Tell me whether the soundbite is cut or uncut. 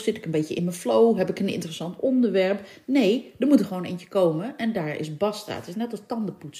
uncut